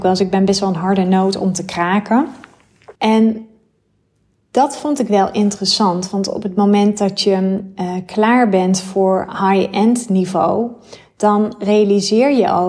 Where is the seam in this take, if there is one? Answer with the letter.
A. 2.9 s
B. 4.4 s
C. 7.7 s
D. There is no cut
A